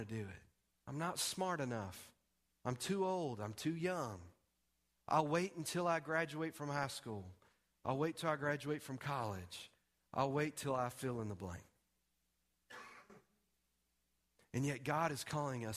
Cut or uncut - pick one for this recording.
uncut